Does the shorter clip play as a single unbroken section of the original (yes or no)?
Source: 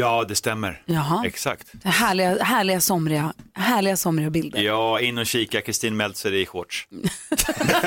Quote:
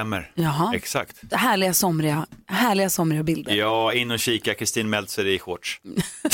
no